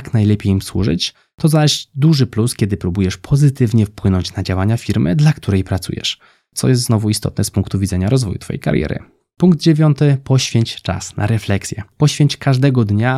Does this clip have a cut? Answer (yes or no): no